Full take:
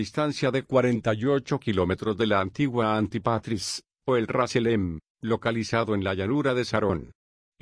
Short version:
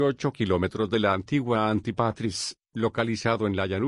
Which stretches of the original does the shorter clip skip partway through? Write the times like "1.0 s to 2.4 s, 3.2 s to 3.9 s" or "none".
3.9 s to 5.1 s